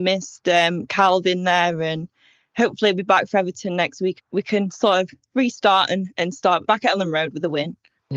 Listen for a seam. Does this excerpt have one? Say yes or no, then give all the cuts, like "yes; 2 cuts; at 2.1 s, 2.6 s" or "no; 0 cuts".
no; 0 cuts